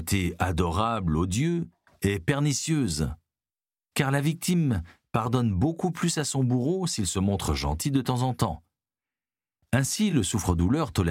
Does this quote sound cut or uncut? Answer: uncut